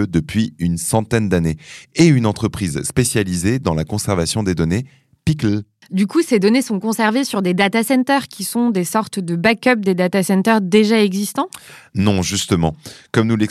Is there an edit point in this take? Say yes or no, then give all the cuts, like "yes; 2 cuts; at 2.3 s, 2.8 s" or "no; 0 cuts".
no; 0 cuts